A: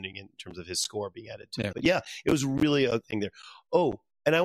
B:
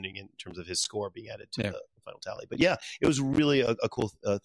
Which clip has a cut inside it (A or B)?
A